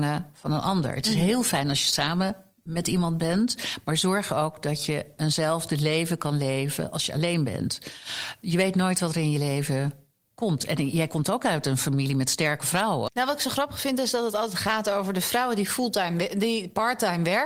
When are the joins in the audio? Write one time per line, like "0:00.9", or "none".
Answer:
0:13.1